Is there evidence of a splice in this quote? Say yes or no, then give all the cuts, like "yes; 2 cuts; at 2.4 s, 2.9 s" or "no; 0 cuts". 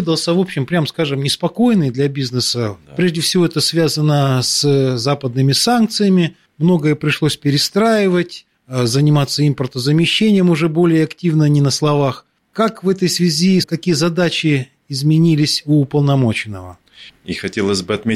yes; 2 cuts; at 13.6 s, 17.2 s